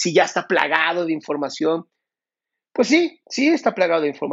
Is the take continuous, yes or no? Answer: yes